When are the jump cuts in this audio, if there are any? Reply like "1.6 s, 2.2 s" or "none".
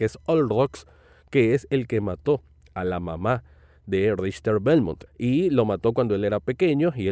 5.1 s